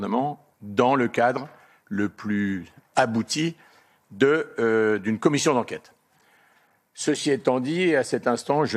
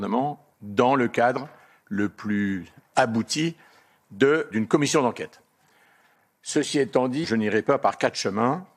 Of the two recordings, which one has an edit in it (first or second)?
second